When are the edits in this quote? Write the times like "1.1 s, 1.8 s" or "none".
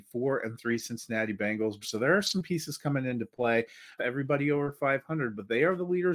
1.8 s, 4.0 s